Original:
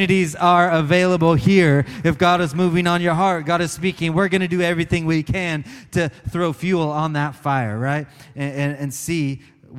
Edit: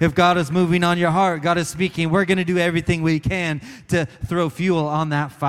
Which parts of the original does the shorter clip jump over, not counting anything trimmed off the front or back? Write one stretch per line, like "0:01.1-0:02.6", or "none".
none